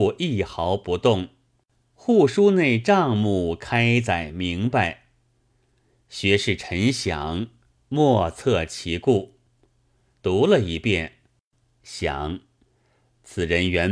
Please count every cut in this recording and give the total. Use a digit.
1